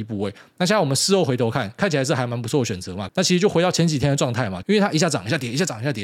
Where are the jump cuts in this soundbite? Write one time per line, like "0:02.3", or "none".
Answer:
0:03.1
0:04.6

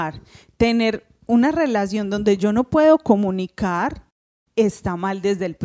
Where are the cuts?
none

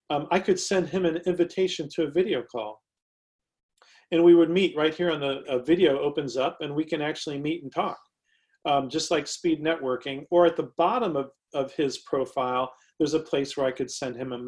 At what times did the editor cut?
0:05.4

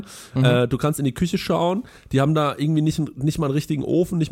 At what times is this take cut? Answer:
none

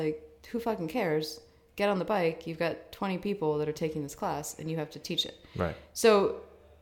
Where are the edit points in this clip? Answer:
none

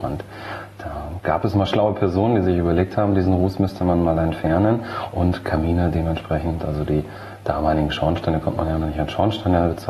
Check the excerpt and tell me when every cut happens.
none

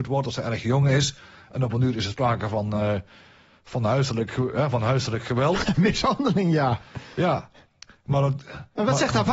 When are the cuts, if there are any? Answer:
none

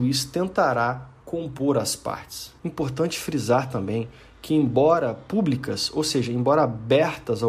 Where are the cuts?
0:02.6

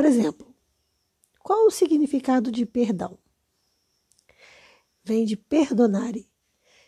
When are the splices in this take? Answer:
0:04.9

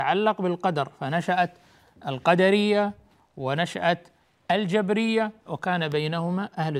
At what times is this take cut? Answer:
0:05.5

